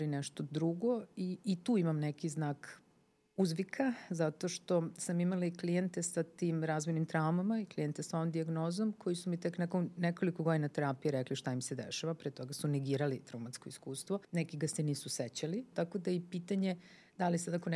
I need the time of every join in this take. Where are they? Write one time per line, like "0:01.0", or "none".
0:14.2
0:15.7